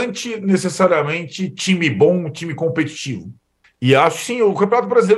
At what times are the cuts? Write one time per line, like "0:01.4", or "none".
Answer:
0:03.6